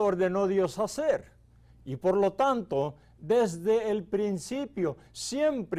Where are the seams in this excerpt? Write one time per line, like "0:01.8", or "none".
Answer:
0:01.7